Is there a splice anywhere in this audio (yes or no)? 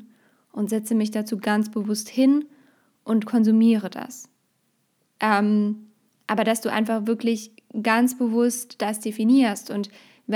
yes